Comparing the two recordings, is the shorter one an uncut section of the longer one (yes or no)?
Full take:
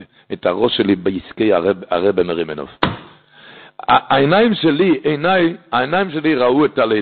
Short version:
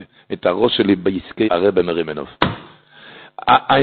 no